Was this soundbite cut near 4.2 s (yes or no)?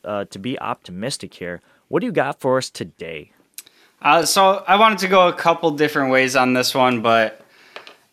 no